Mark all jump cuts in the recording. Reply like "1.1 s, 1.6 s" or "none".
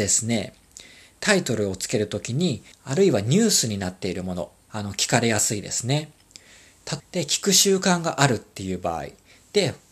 2.7 s, 4.7 s, 7.0 s